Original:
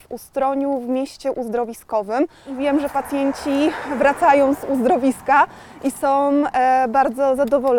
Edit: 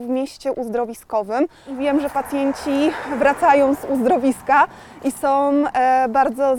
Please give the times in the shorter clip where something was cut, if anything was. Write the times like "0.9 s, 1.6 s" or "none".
none